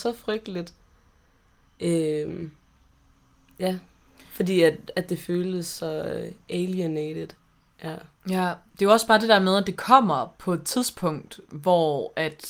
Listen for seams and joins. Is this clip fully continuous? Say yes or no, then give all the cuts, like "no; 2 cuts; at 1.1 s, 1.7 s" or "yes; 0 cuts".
yes; 0 cuts